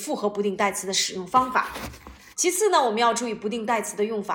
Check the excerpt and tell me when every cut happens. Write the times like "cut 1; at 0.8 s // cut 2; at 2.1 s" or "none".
cut 1; at 2.3 s